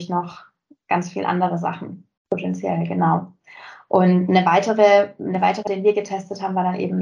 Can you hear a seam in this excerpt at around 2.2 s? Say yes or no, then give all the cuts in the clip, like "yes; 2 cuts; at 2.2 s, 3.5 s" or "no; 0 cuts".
yes; 2 cuts; at 2.2 s, 5.7 s